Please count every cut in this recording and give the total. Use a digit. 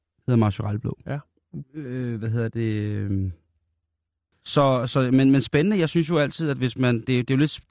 2